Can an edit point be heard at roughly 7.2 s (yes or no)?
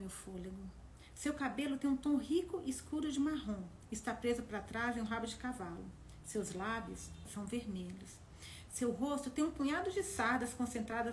yes